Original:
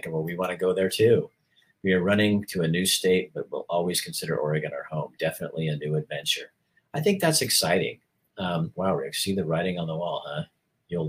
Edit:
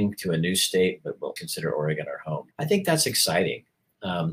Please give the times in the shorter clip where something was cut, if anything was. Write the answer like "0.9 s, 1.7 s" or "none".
1.4 s, 2.5 s